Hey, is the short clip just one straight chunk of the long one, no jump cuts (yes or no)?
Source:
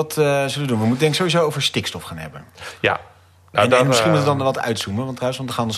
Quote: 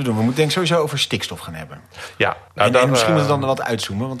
no